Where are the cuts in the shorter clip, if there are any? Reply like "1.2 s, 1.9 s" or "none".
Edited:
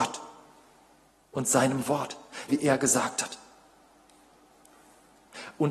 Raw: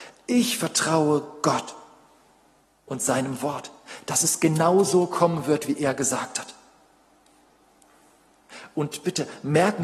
2.5 s